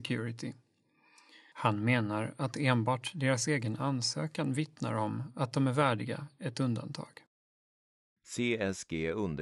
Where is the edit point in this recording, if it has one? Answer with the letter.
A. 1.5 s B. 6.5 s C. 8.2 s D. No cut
A